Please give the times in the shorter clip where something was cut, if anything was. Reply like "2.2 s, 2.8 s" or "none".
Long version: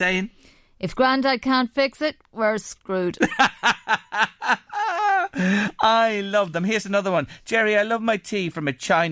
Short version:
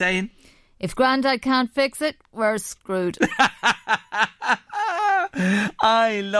none